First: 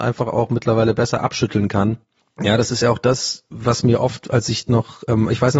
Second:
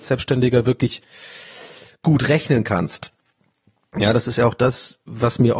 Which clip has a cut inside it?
first; 1 cut; at 2.2 s

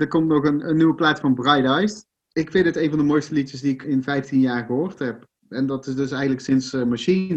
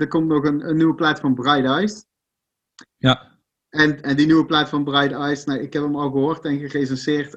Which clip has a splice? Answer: first; 2 cuts; at 2.2 s, 3.8 s

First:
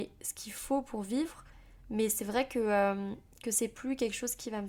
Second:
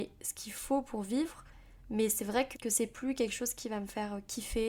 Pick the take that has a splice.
second; 1 cut; at 2.5 s

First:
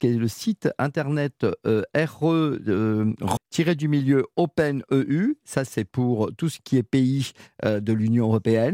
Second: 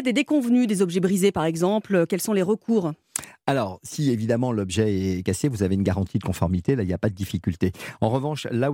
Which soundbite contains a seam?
first; 1 cut; at 3.4 s

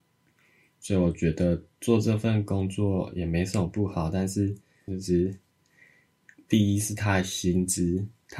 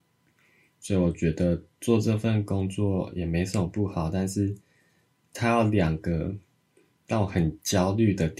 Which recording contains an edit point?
first; 1 cut; at 4.9 s

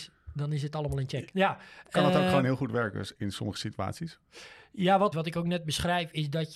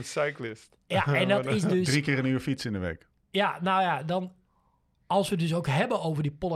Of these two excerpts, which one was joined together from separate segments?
first; 2 cuts; at 1.3 s, 5.1 s

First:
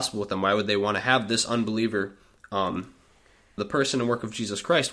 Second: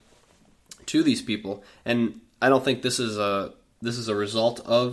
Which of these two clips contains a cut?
first; 1 cut; at 3.6 s

